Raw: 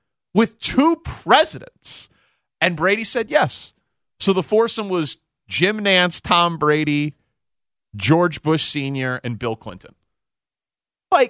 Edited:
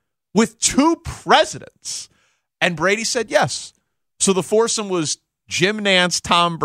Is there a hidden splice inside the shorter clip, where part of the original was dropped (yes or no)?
no